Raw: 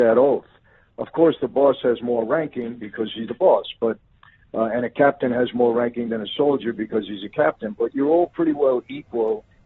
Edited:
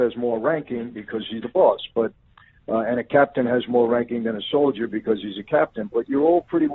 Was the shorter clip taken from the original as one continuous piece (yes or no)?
yes